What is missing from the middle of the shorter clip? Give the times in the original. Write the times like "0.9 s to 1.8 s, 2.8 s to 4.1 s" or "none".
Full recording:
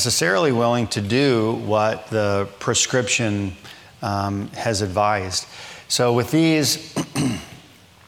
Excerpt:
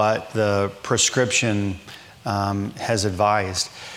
none